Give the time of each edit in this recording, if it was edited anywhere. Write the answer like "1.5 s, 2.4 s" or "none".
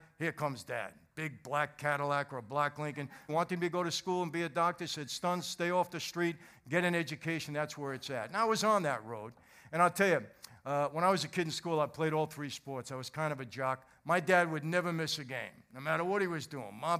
3.3 s